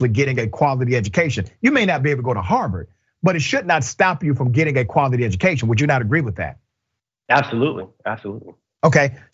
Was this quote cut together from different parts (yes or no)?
no